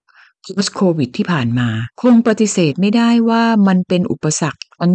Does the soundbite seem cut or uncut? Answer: cut